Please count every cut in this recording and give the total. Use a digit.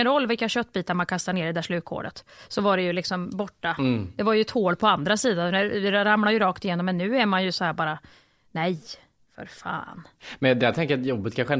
0